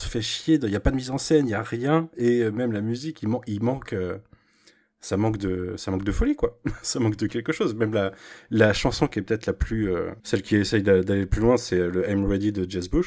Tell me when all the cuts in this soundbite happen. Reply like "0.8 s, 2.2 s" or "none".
10.2 s